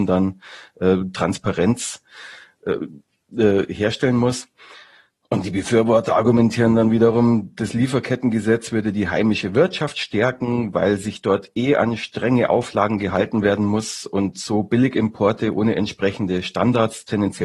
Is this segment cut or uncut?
uncut